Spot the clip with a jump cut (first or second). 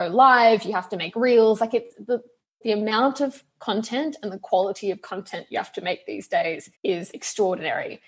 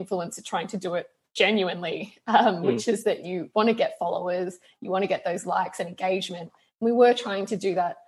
first